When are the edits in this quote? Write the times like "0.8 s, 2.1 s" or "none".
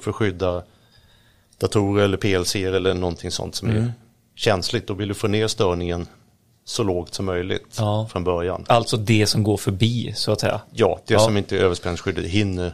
none